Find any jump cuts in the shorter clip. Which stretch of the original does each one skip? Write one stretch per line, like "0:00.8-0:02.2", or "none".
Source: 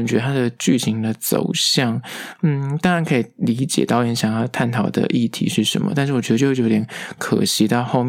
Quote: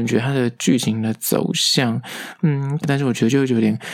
0:02.8-0:05.9

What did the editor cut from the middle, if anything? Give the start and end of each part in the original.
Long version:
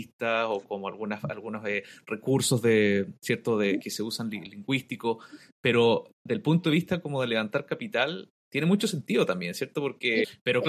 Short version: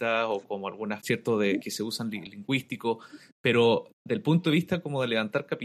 0:01.2-0:03.2

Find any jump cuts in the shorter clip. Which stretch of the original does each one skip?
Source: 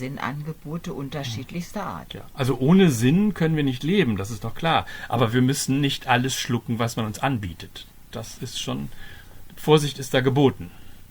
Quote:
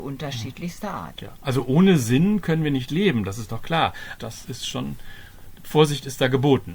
0:05.1-0:08.1

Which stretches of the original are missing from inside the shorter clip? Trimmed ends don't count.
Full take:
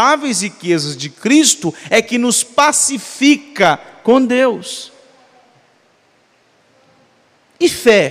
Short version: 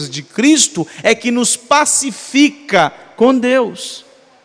none

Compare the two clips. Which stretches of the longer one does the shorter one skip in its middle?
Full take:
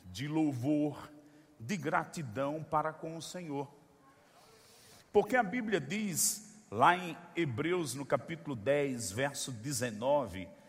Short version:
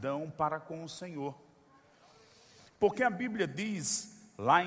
none

